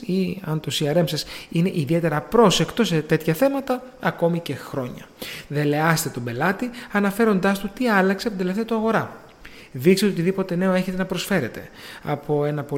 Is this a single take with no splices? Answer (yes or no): no